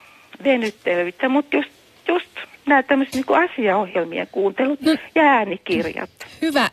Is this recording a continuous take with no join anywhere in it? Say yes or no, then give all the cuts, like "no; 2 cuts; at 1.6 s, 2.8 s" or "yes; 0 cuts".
yes; 0 cuts